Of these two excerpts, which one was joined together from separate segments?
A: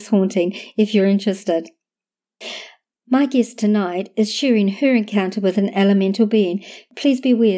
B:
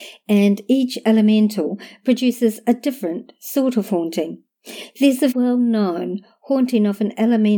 B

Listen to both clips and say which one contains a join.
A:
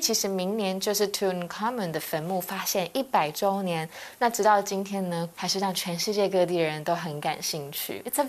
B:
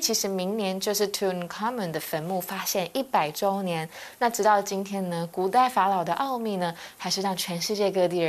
A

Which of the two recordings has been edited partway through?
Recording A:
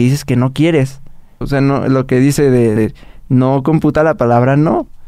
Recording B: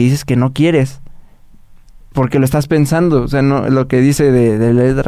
A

